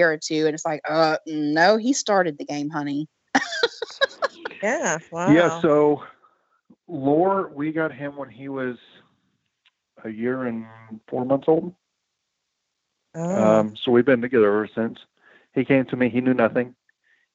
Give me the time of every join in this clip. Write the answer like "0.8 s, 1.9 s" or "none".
none